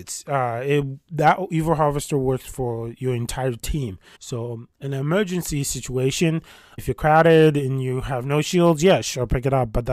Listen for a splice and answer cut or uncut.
cut